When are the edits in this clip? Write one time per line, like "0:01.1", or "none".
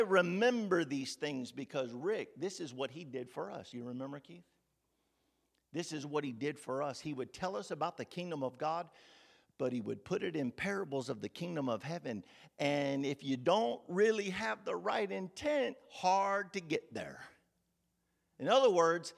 none